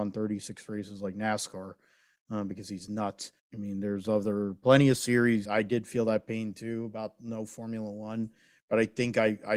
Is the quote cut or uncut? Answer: cut